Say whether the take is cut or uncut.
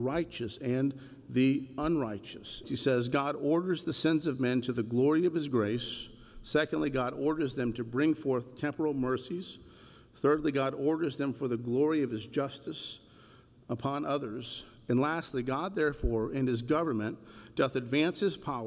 cut